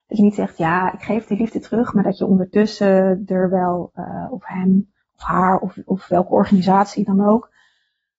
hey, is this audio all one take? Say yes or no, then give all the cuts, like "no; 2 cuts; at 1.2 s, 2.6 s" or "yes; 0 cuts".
yes; 0 cuts